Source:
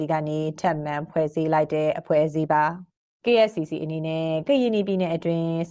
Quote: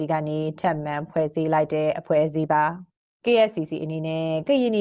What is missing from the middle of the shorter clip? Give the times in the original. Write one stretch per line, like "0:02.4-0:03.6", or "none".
none